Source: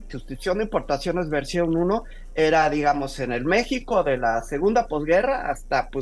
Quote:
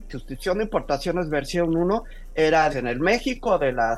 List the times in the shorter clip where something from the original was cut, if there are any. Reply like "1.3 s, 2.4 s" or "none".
2.7 s